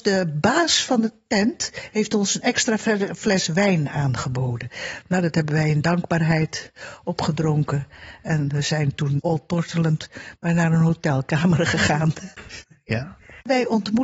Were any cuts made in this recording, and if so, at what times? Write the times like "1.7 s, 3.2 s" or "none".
9.2 s, 12.6 s